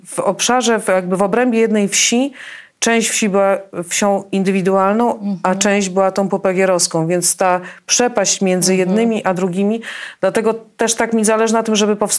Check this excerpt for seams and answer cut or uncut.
uncut